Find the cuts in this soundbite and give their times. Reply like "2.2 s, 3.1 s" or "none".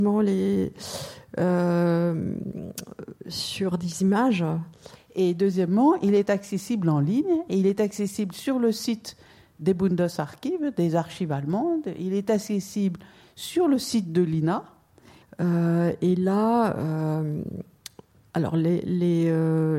5.0 s, 15.2 s